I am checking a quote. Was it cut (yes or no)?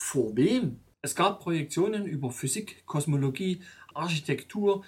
yes